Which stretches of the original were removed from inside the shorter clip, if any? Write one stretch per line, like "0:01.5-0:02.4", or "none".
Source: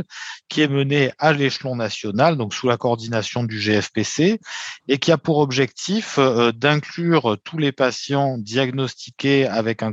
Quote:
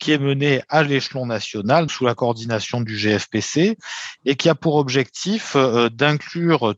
0:02.4-0:02.5